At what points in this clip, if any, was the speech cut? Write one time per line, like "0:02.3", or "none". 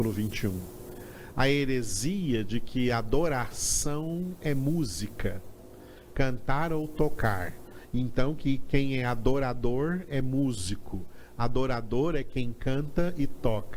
0:06.1